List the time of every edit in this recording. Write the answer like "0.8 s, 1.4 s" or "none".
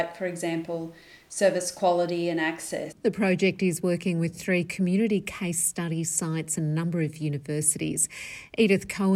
2.9 s